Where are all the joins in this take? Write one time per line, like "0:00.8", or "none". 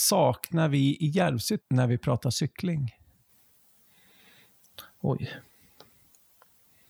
0:01.6